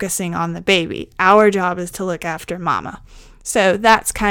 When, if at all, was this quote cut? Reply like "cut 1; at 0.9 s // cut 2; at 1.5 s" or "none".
none